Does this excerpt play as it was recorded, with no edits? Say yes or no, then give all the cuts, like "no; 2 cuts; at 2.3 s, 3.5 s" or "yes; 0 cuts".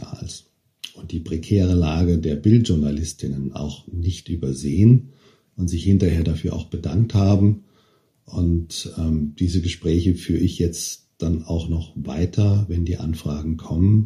yes; 0 cuts